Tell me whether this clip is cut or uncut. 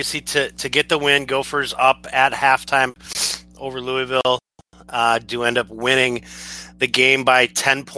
uncut